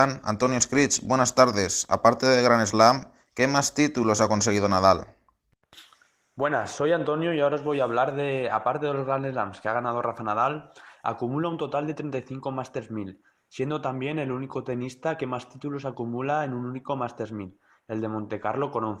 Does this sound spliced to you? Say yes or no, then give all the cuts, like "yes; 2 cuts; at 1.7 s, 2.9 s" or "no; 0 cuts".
no; 0 cuts